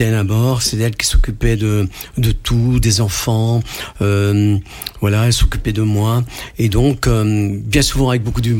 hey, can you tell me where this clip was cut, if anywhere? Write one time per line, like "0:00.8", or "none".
none